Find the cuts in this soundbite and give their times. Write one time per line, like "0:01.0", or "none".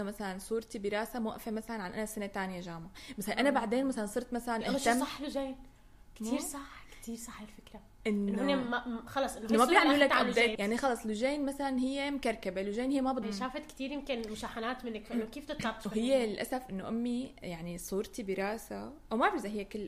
0:10.6
0:13.2